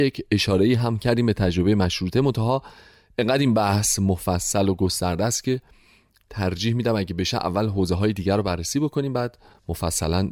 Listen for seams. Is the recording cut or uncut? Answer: uncut